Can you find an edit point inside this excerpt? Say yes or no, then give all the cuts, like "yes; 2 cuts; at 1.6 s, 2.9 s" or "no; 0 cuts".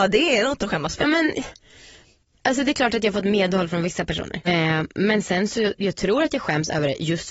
yes; 2 cuts; at 1.0 s, 4.4 s